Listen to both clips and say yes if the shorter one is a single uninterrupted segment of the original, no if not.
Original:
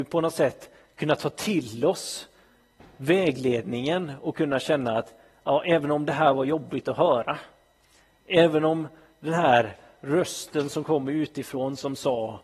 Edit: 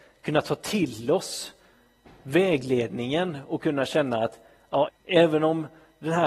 no